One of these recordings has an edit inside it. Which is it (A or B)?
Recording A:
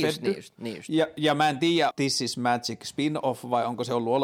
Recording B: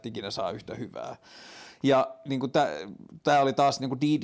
A